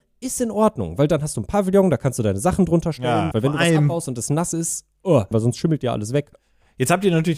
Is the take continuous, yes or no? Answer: no